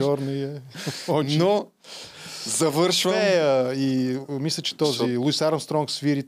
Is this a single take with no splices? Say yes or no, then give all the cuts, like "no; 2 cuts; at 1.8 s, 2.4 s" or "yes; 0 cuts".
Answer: yes; 0 cuts